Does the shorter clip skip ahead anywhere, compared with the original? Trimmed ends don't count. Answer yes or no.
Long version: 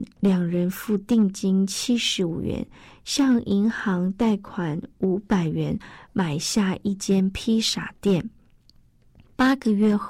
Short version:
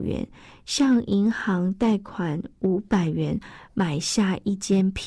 no